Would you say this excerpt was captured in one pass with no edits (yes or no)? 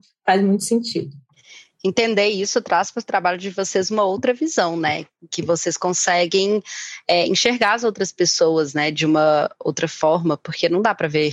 yes